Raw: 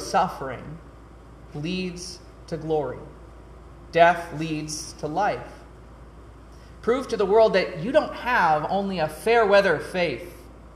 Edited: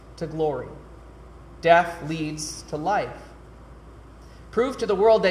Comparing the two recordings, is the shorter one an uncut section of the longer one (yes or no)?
yes